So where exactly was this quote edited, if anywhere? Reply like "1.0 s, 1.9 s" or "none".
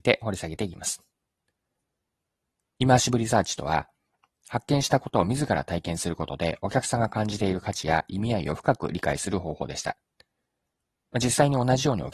2.7 s